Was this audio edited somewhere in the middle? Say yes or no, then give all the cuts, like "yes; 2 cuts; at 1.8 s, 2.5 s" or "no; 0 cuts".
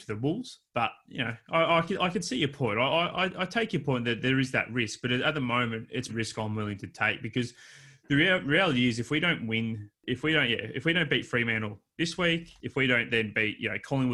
yes; 1 cut; at 6.1 s